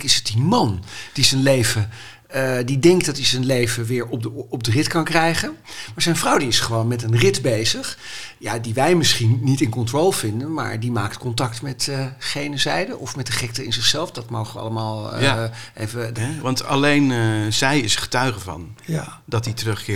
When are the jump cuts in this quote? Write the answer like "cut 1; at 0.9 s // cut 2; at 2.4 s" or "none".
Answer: cut 1; at 16.2 s